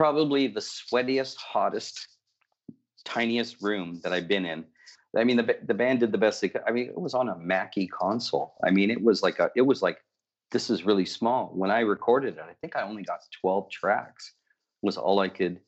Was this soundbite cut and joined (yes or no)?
no